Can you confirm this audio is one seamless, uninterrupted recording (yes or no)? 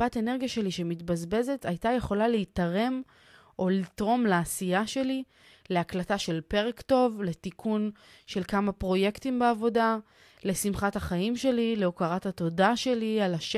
yes